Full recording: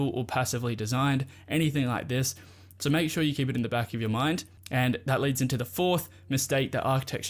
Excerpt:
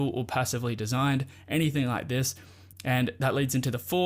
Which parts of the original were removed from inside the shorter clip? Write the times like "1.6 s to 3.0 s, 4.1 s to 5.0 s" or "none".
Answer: 2.7 s to 4.6 s